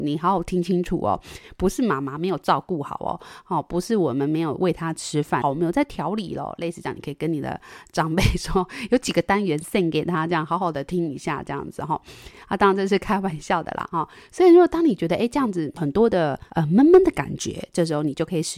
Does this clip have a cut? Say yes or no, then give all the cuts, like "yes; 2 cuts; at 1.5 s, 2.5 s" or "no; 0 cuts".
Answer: yes; 1 cut; at 5.4 s